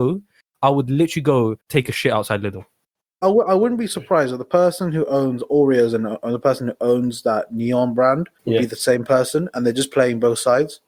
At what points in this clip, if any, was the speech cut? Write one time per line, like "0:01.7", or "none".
0:08.3

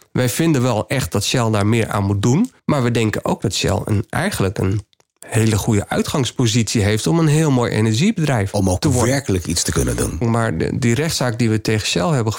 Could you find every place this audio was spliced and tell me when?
0:02.6
0:10.2

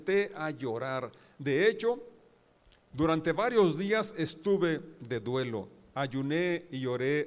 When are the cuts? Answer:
none

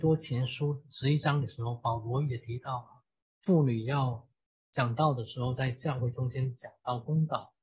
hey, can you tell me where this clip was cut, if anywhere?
none

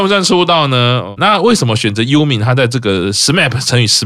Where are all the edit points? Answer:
0:01.2

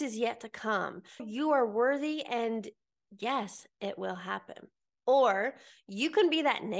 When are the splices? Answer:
0:01.2

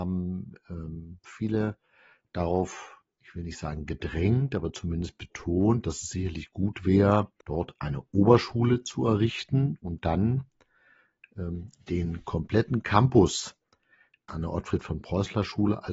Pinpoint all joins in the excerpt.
0:07.4
0:14.3

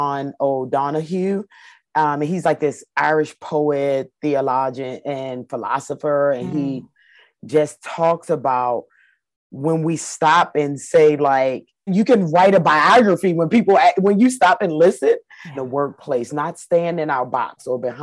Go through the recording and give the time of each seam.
0:11.9
0:15.5

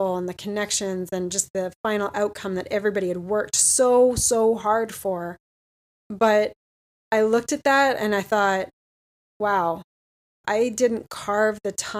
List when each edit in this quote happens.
0:10.4

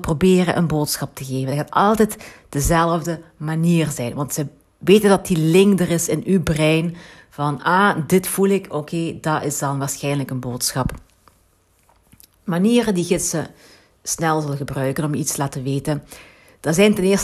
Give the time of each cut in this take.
none

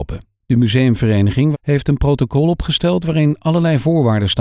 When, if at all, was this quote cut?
0:01.5

